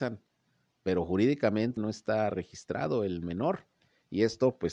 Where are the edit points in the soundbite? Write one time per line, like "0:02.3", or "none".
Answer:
0:01.8